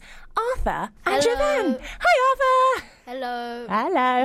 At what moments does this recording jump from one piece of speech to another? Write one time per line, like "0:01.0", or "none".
0:01.0